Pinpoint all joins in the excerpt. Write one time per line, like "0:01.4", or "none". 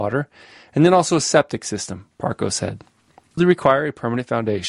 0:03.4